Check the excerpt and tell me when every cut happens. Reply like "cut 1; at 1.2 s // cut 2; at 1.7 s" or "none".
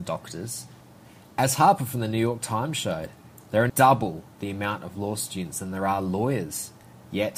cut 1; at 3.7 s